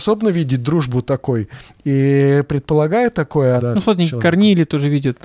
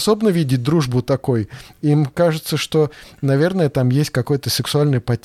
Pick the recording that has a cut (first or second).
first